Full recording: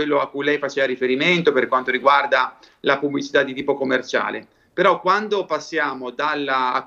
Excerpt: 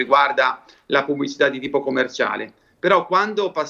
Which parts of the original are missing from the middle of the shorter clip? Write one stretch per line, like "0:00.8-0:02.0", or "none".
none

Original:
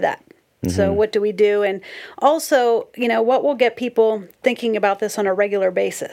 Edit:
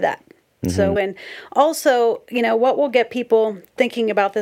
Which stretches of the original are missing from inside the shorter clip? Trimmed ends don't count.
0:01.0-0:01.6

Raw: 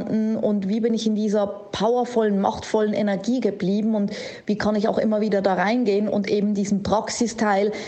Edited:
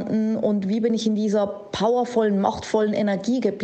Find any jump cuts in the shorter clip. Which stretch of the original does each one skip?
none

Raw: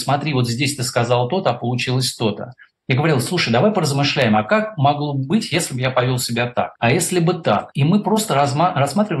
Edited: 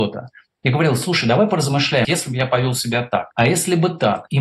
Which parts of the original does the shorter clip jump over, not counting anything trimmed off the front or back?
0:04.3-0:05.5

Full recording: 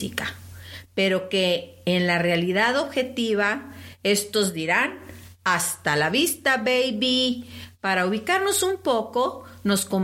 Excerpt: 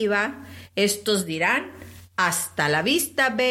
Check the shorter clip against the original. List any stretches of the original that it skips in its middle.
none

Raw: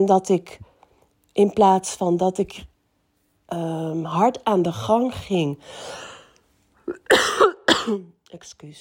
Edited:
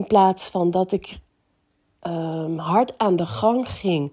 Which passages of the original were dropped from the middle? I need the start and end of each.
none

